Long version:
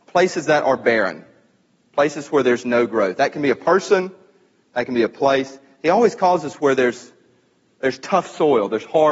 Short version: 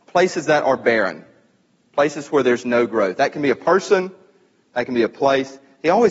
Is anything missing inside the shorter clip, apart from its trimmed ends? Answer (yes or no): no